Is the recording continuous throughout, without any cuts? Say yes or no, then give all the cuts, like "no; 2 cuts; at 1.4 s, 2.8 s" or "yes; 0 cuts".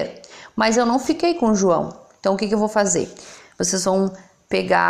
yes; 0 cuts